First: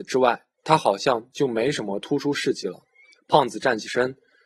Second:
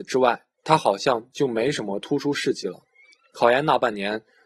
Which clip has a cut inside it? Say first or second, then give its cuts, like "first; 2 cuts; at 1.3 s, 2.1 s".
first; 1 cut; at 3.1 s